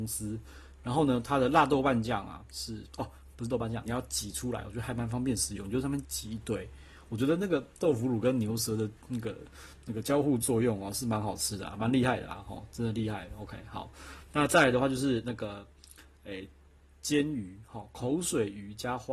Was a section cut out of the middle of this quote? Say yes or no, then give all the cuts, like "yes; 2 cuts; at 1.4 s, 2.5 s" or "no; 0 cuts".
yes; 2 cuts; at 3.9 s, 6.0 s